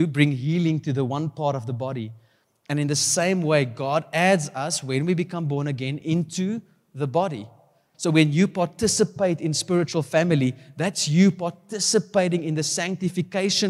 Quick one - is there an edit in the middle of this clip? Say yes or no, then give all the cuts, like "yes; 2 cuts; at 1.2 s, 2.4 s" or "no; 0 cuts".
yes; 1 cut; at 7.9 s